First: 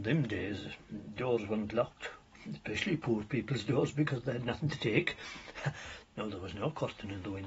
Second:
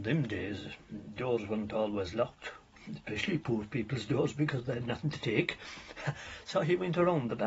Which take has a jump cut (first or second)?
first